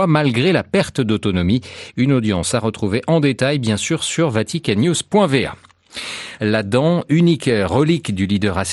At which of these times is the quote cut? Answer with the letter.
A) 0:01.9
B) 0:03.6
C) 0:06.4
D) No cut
C